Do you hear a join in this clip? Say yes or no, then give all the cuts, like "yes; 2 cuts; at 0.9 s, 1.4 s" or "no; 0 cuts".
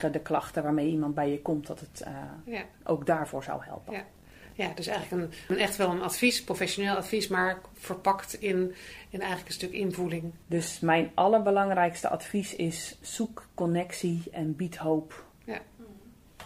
yes; 3 cuts; at 10.4 s, 13.0 s, 15.3 s